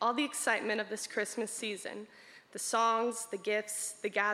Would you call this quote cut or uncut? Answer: uncut